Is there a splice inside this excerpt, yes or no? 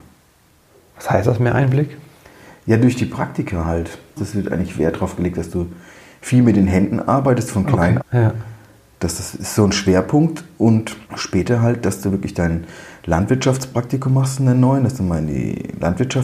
yes